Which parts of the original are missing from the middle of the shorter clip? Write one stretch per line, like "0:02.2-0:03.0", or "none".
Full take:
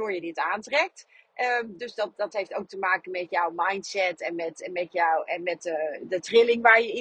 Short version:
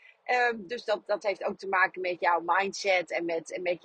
none